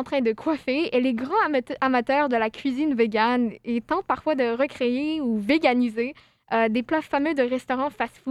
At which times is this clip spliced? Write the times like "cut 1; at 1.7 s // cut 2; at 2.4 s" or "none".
none